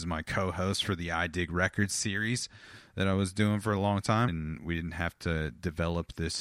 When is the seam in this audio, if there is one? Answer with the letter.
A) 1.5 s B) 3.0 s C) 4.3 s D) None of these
C